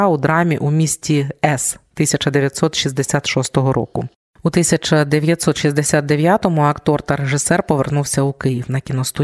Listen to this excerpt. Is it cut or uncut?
uncut